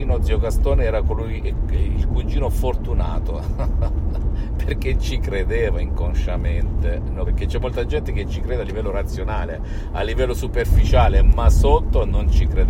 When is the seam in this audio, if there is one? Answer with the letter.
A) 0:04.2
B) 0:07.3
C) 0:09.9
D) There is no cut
B